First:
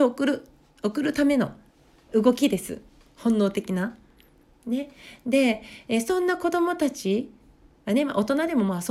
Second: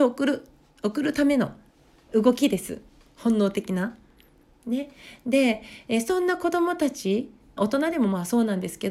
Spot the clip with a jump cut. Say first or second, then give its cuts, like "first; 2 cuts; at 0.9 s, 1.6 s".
second; 1 cut; at 7.6 s